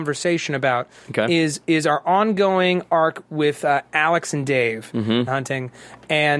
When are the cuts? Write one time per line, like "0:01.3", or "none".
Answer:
0:05.3